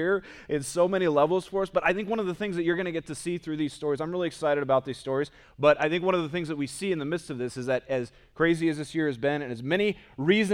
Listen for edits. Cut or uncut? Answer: cut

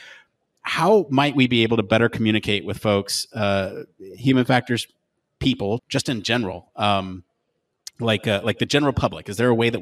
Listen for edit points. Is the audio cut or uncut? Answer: cut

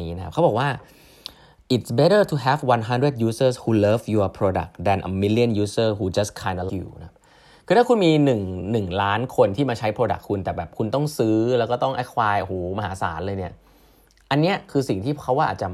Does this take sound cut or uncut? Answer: cut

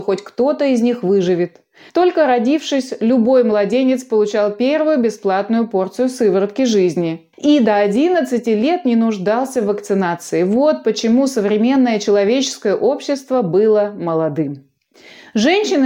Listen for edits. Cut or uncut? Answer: cut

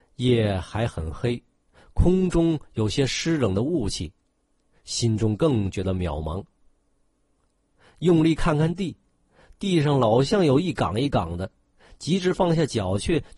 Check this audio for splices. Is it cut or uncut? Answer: uncut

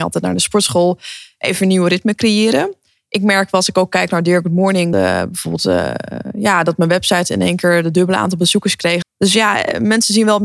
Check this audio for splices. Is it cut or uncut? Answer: cut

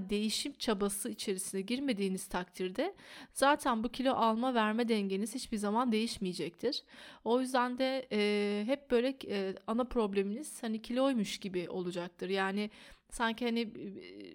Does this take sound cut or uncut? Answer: uncut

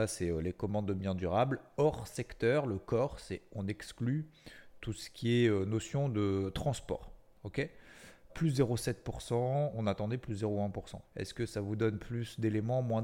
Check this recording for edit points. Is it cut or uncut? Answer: cut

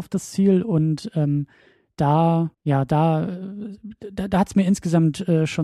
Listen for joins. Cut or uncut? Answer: cut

